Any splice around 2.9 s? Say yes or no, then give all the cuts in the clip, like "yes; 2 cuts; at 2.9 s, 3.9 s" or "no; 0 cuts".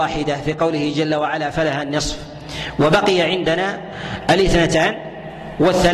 no; 1 cut; at 1.5 s